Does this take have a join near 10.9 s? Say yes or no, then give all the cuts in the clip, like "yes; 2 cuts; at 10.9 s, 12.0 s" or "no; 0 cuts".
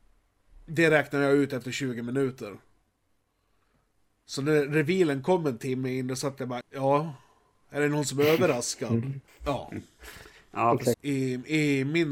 yes; 3 cuts; at 6.6 s, 9.3 s, 10.9 s